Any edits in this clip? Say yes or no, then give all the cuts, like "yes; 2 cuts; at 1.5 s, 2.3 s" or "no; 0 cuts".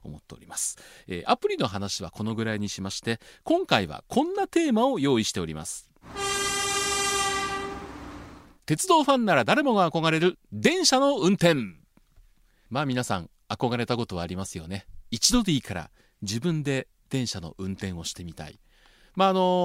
no; 0 cuts